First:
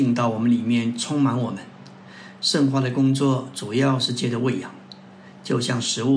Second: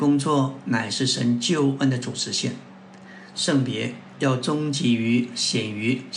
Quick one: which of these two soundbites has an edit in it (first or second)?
second